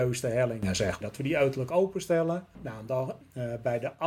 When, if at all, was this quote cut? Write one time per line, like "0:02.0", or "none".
0:01.0